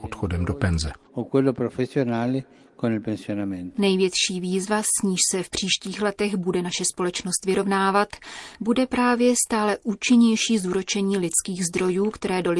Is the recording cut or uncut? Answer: uncut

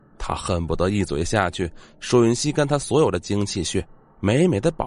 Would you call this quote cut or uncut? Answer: uncut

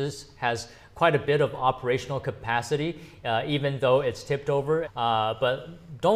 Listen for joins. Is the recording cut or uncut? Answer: cut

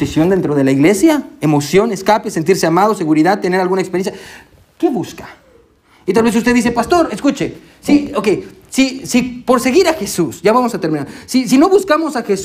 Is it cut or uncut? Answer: uncut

